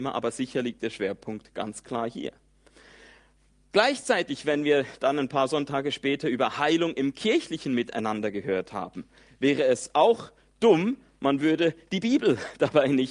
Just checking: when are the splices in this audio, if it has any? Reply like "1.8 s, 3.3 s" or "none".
none